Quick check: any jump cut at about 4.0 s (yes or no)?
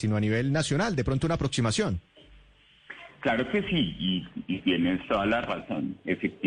no